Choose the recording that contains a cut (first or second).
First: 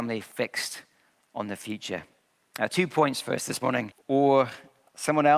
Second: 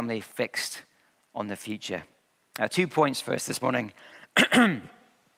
first